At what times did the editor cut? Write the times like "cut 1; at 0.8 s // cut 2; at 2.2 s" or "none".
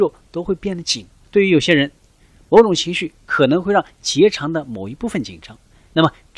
cut 1; at 1.2 s